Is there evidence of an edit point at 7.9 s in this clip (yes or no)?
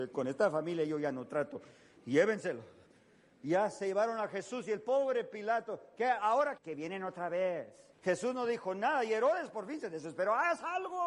yes